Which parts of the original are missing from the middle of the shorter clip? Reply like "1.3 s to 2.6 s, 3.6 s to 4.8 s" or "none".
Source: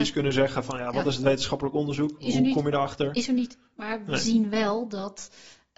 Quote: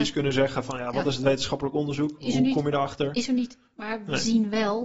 none